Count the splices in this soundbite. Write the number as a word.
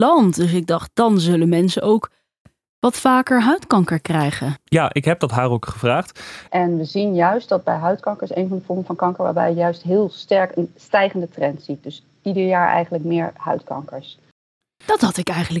one